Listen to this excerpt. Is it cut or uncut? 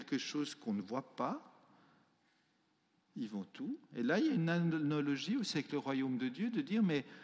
uncut